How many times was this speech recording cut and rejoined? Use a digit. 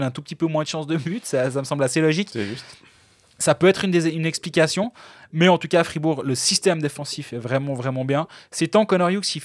0